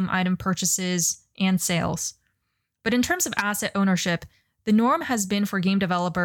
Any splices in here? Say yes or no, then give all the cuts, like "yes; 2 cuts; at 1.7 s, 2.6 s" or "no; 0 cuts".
no; 0 cuts